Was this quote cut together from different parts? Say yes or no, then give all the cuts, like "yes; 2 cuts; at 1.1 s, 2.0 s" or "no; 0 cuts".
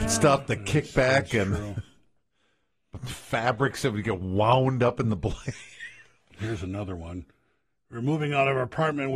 yes; 1 cut; at 6.3 s